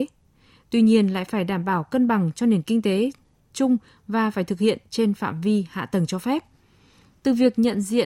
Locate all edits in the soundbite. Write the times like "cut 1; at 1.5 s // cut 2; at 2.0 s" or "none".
none